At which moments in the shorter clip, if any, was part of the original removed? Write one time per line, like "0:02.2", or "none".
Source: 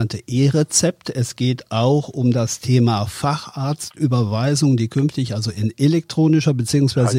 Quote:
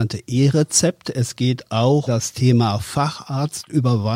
0:02.1